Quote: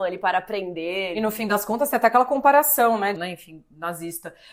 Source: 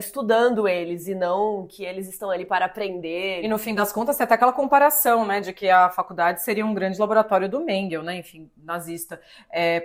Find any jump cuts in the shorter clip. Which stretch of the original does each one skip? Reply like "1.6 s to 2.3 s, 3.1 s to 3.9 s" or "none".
5.4 s to 8.0 s